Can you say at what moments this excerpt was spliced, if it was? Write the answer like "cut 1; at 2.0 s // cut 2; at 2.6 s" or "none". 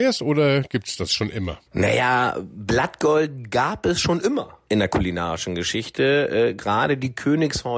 cut 1; at 1.7 s // cut 2; at 4.7 s